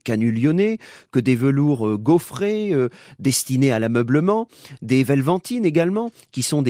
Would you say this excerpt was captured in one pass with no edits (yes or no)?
yes